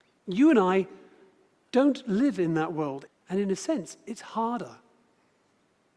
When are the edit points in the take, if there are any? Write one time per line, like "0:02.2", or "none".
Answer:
0:03.1